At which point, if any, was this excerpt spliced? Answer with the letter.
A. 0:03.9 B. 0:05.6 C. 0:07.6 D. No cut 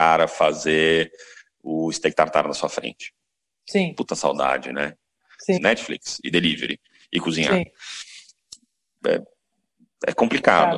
B